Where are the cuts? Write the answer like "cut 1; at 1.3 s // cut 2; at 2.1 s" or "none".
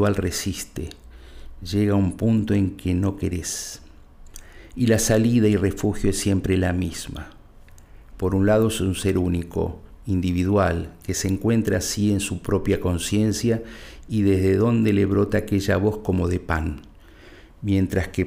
cut 1; at 8.1 s